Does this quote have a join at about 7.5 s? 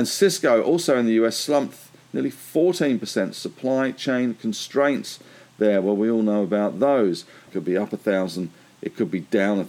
yes; 1 cut; at 7.5 s

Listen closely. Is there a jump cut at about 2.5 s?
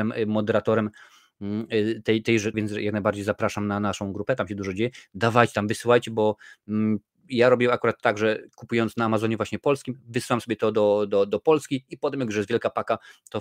yes; 1 cut; at 2.5 s

